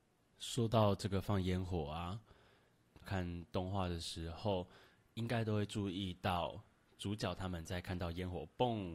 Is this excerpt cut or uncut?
cut